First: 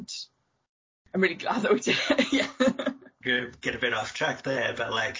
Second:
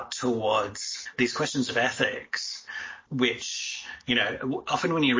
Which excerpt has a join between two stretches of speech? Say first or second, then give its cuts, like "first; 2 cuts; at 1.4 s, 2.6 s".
first; 1 cut; at 3.2 s